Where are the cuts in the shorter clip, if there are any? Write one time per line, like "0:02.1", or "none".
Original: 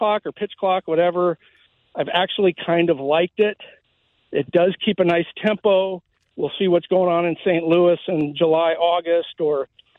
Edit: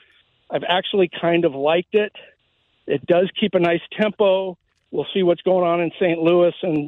none